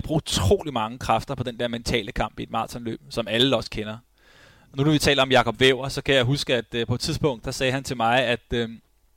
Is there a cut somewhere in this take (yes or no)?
no